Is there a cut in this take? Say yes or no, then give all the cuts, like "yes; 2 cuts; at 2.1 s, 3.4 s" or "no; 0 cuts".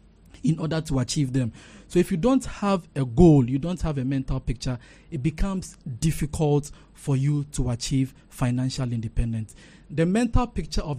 no; 0 cuts